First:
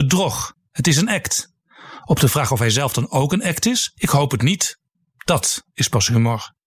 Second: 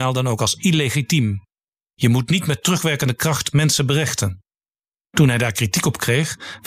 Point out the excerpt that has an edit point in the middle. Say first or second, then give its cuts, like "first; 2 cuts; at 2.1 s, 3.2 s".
first; 1 cut; at 3.9 s